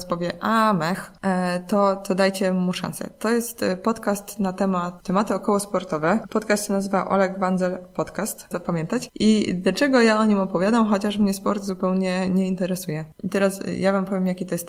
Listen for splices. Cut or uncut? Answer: cut